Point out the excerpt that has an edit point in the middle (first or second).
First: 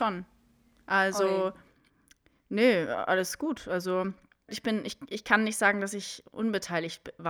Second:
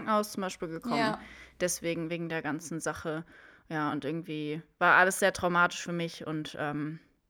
first